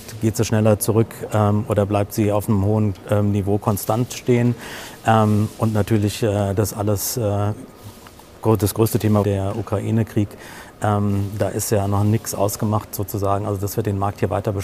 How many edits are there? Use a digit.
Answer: 1